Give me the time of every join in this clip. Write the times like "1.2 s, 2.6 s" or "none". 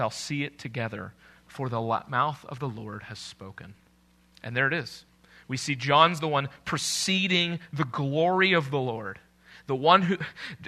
none